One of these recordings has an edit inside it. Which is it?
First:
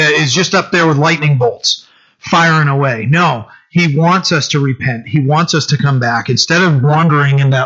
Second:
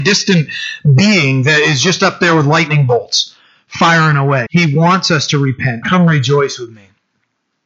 second; 2 cuts; at 4.5 s, 5.8 s

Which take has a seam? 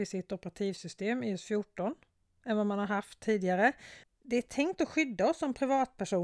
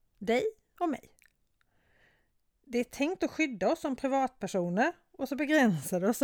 first; 1 cut; at 4.0 s

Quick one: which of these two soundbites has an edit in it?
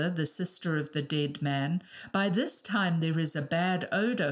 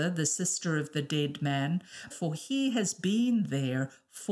second; 1 cut; at 2.1 s

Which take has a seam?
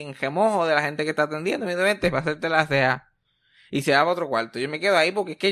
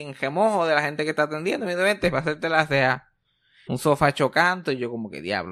second; 1 cut; at 3.7 s

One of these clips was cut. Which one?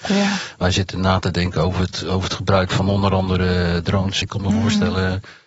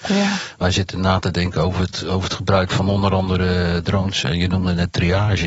first; 1 cut; at 4.2 s

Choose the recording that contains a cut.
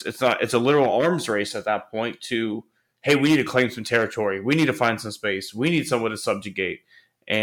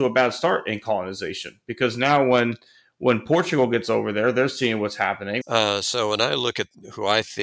second; 1 cut; at 5.4 s

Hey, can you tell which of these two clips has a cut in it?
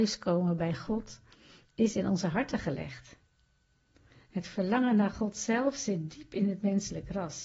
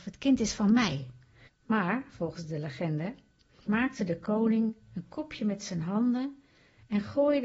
second; 2 cuts; at 1.5 s, 3.7 s

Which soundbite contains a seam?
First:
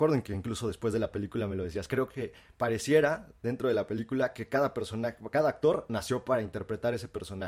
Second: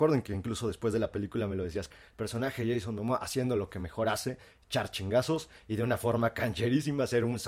second; 1 cut; at 1.9 s

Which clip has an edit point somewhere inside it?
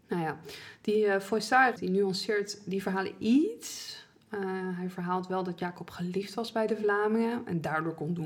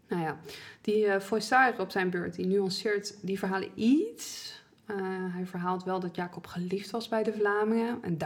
first; 1 cut; at 1.8 s

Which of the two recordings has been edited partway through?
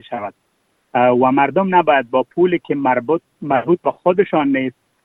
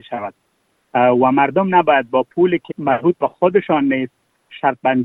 second; 1 cut; at 2.7 s

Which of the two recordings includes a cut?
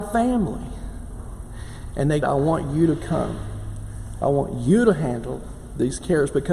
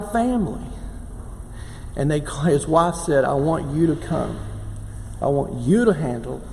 first; 1 cut; at 2.2 s

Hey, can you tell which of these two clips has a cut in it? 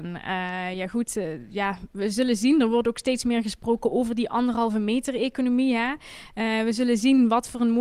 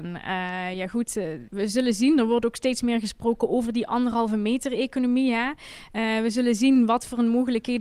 second; 1 cut; at 1.5 s

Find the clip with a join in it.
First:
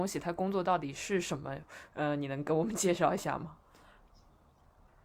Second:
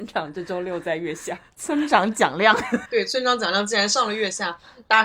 second; 1 cut; at 2.9 s

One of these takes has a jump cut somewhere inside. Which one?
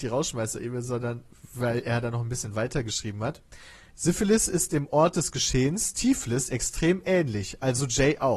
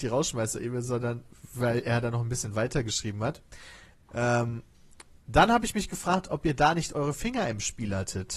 first; 1 cut; at 3.9 s

